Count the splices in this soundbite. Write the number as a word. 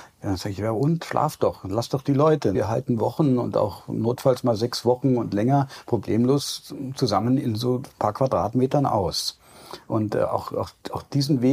two